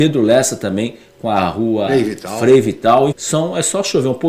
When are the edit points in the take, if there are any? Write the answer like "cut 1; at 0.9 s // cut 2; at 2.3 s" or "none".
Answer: cut 1; at 1.9 s // cut 2; at 3.1 s